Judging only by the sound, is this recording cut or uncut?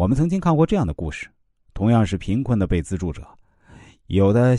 uncut